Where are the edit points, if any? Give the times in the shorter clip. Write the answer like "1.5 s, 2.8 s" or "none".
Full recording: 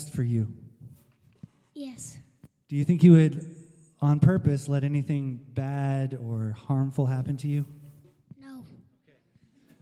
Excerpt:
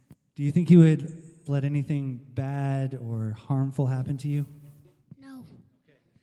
1.5 s

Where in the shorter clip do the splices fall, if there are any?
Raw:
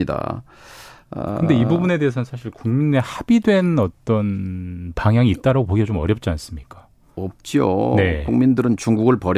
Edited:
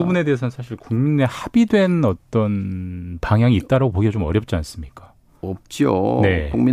none

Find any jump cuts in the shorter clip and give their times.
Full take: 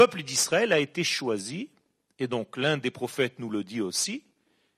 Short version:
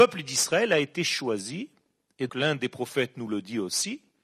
2.3 s

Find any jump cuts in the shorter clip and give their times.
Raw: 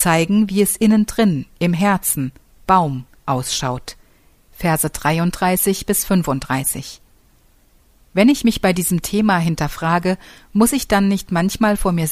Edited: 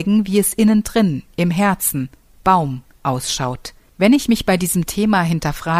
3.9 s

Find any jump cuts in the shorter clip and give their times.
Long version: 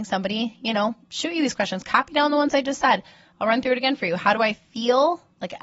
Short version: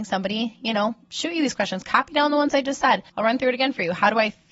3.1 s

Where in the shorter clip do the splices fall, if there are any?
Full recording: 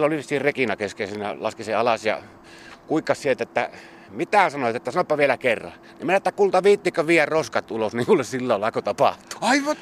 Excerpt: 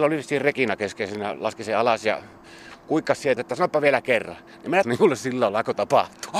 3.4 s, 4.8 s

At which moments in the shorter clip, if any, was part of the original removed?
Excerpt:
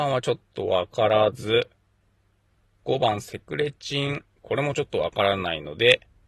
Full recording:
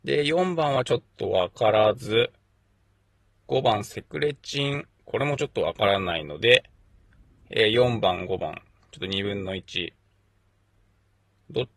none

